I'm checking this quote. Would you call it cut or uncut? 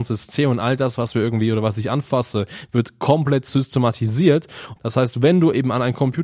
cut